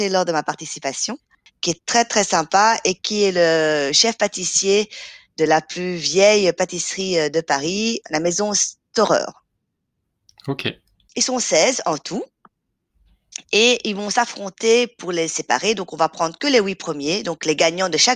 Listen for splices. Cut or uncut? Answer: uncut